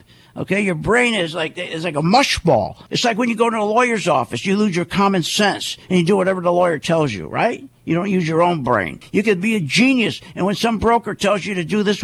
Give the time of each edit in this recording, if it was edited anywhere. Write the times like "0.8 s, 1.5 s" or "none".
2.9 s, 9.0 s